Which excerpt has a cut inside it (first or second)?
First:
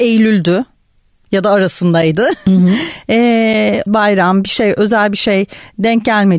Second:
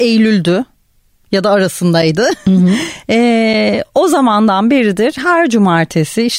first